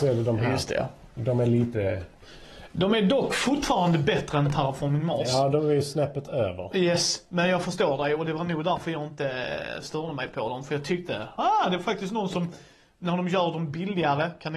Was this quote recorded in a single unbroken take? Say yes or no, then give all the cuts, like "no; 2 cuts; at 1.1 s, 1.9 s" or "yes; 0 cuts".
yes; 0 cuts